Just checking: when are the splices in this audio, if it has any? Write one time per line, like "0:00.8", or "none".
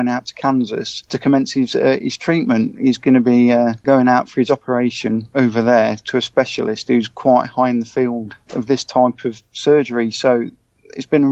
none